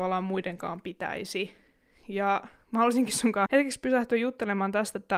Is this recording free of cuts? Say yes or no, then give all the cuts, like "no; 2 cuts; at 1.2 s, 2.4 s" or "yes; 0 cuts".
no; 1 cut; at 3.5 s